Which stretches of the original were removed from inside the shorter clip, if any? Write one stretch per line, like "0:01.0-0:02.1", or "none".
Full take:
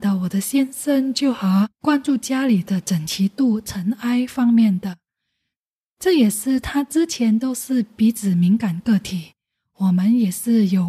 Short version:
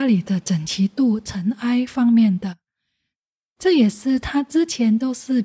none